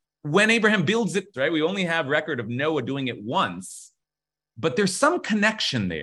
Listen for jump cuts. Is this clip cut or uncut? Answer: cut